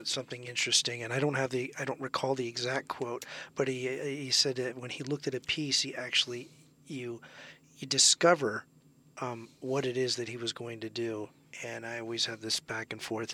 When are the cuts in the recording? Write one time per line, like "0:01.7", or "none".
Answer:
none